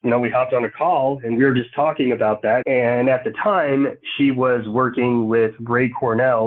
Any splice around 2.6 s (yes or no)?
yes